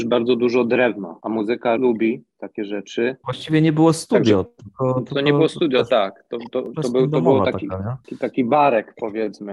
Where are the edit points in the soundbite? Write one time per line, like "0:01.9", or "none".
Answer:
none